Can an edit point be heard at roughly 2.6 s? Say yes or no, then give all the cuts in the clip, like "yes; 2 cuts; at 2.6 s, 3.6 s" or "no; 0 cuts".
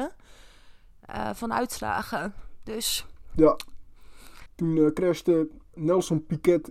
no; 2 cuts; at 4.5 s, 5.7 s